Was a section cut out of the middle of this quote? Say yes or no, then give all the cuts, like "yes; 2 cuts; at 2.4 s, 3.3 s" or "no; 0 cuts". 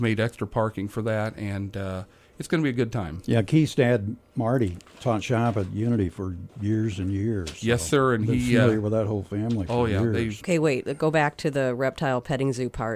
yes; 1 cut; at 10.4 s